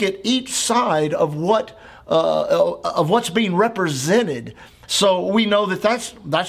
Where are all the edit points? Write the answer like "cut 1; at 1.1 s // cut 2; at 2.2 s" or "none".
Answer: cut 1; at 4.8 s

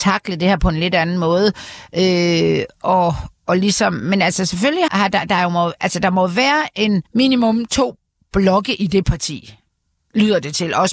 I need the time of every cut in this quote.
cut 1; at 4.9 s // cut 2; at 7.1 s

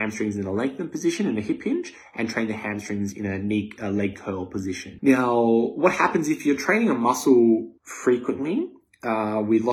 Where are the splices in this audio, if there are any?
cut 1; at 5.0 s // cut 2; at 7.8 s

